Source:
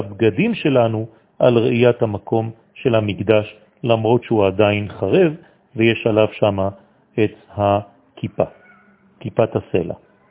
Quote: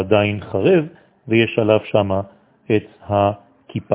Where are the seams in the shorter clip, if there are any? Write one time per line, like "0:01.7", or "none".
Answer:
none